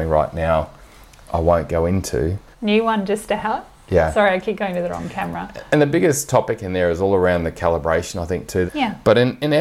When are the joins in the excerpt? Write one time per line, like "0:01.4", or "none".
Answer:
0:02.5
0:08.7